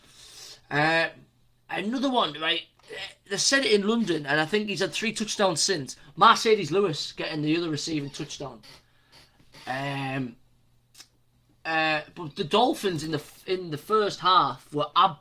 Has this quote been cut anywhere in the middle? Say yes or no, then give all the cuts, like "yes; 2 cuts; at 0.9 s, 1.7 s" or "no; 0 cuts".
no; 0 cuts